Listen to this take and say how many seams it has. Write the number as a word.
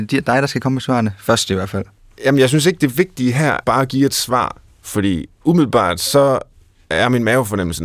one